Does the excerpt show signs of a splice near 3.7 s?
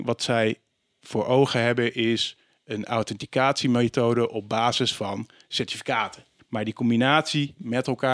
no; 1 cut; at 6.4 s

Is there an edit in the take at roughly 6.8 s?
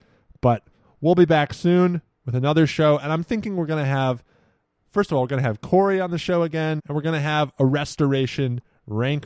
yes; 1 cut; at 6.8 s

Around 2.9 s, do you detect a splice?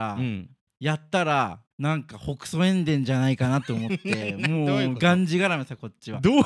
no; 1 cut; at 1.7 s

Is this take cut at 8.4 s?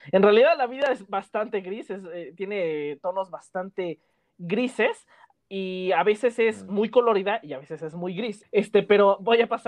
yes; 1 cut; at 8.4 s

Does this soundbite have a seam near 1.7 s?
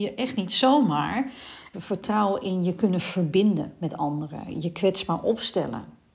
yes; 1 cut; at 1.7 s

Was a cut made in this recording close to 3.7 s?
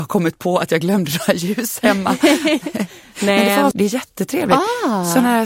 yes; 1 cut; at 3.7 s

